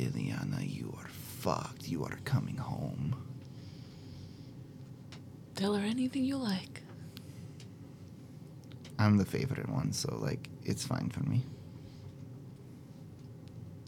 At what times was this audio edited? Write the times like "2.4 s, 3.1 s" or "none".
none